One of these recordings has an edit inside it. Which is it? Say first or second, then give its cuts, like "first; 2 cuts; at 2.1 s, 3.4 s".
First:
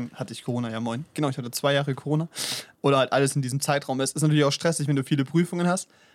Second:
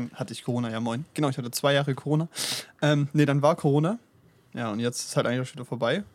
first; 1 cut; at 2.7 s